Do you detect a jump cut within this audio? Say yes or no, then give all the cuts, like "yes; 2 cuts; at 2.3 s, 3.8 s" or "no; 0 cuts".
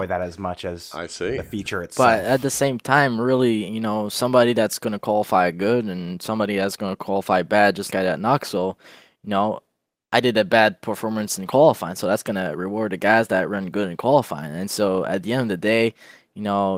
yes; 1 cut; at 7.9 s